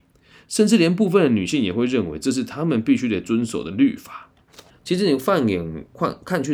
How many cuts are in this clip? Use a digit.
1